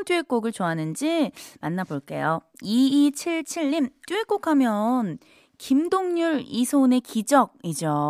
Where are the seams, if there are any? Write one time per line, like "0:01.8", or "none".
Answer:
0:04.0